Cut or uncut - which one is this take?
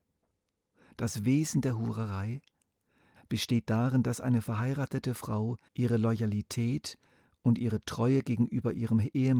cut